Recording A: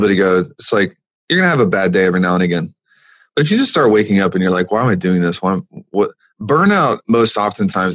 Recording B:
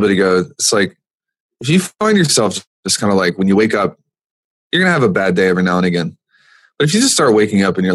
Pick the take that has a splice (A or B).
A